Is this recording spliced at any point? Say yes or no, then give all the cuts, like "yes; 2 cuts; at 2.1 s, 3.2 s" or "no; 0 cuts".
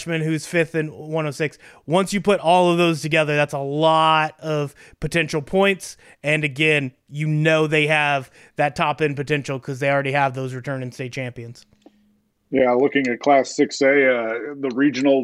no; 0 cuts